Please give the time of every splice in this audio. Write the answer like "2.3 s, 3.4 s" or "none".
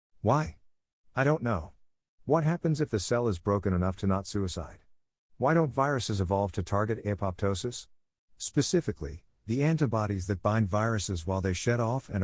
none

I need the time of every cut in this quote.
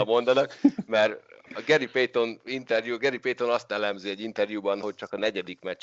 4.8 s

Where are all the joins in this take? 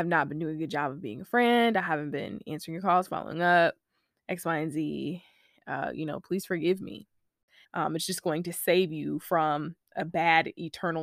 7.6 s

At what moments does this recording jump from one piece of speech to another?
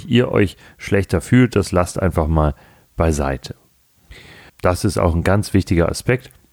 4.5 s

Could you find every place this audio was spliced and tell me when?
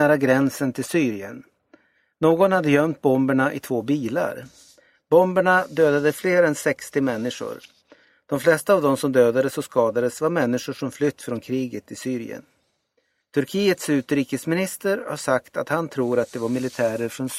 none

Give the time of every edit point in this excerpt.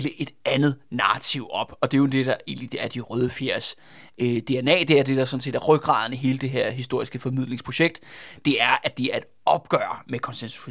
none

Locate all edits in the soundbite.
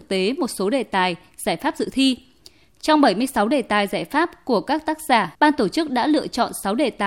5.3 s

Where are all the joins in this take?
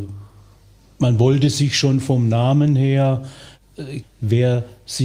4.0 s

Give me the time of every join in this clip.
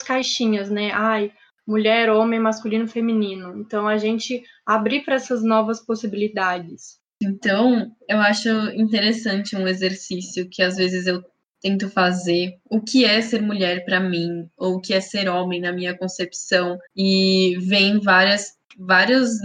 12.6 s, 16.9 s

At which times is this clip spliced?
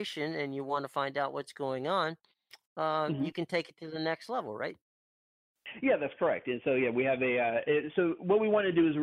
none

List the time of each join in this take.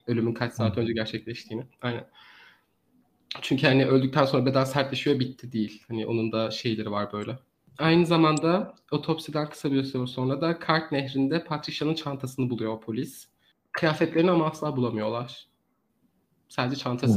none

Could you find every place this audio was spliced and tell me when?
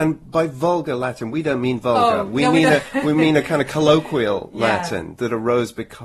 none

